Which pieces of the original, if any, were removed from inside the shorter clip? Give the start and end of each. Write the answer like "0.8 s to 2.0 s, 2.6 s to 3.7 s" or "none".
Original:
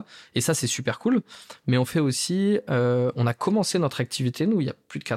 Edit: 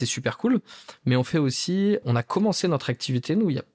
2.6 s to 3.1 s

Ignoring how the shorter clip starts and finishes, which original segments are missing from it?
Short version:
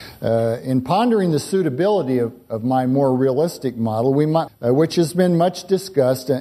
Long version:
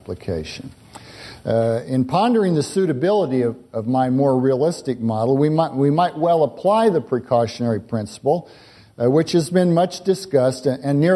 5.7 s to 8.8 s

